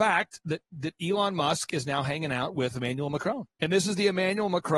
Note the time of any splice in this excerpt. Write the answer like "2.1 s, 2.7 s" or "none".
3.5 s